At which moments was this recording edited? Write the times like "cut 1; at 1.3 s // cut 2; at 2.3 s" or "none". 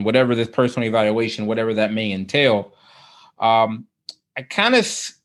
none